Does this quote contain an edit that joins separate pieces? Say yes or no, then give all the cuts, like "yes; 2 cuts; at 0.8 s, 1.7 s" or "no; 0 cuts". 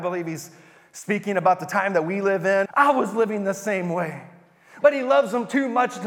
yes; 2 cuts; at 2.6 s, 4.8 s